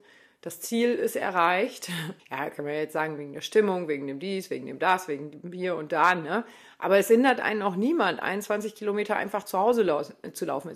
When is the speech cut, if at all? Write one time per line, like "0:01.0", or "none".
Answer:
0:02.2